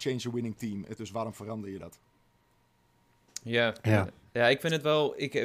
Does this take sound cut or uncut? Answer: cut